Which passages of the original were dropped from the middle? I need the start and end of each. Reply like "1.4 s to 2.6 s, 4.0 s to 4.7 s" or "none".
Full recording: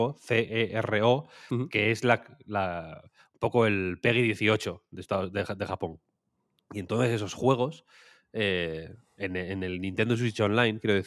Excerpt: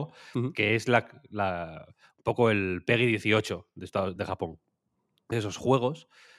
5.3 s to 5.6 s, 6.7 s to 7.1 s